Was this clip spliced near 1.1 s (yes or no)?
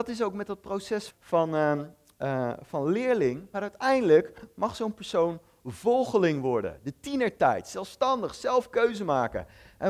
yes